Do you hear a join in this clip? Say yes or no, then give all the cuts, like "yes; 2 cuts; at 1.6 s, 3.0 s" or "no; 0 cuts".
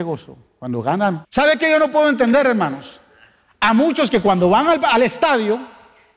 yes; 1 cut; at 1.2 s